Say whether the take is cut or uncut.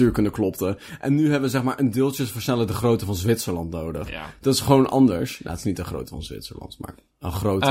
uncut